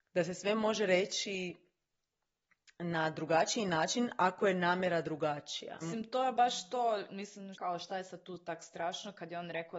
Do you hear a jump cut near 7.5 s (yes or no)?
yes